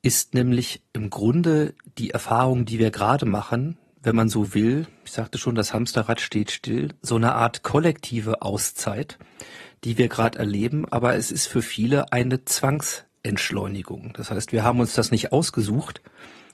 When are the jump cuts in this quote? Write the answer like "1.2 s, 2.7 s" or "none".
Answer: none

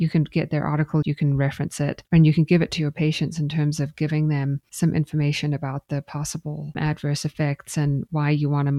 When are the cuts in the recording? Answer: 1.0 s

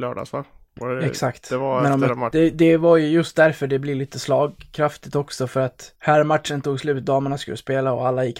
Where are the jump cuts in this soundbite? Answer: 2.3 s, 6.0 s

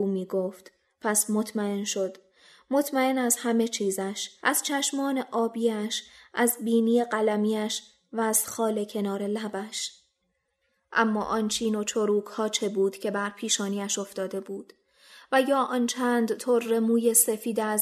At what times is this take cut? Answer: 4.4 s

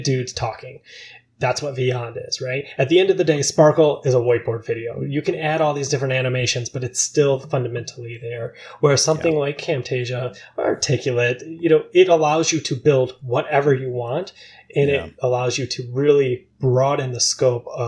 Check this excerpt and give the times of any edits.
none

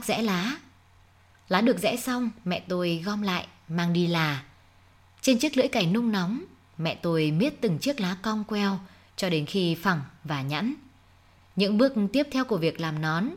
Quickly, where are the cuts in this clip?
none

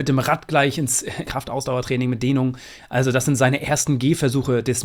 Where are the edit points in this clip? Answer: 1.3 s, 2.8 s

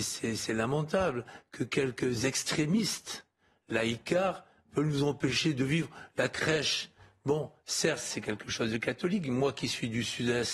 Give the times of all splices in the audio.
none

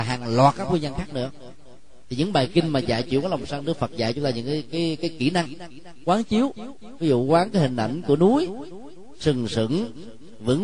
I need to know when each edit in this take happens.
none

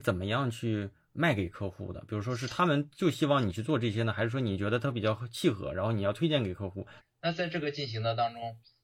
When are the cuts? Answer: 7.0 s

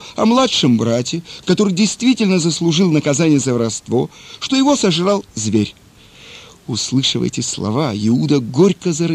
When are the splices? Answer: none

